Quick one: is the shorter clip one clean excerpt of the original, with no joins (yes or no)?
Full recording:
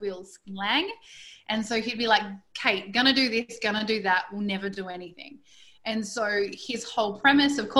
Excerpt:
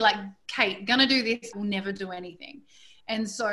no